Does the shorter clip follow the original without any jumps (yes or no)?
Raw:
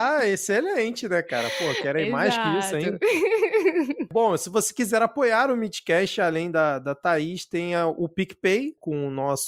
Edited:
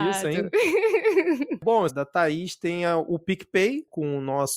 no